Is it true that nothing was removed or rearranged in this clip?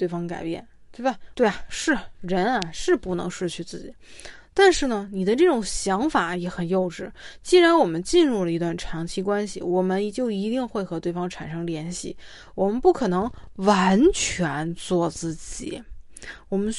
no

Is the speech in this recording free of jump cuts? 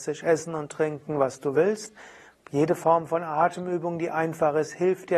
yes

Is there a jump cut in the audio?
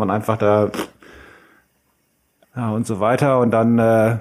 yes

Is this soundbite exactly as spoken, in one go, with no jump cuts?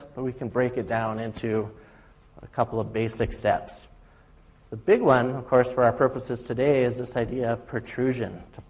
yes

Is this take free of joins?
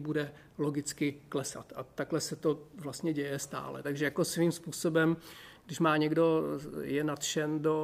no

